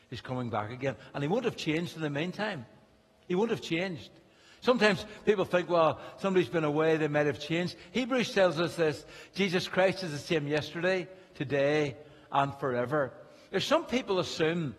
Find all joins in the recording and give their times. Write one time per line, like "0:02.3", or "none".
none